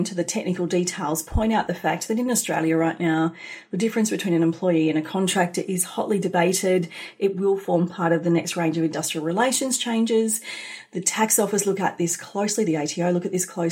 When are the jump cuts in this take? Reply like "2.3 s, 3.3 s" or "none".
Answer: none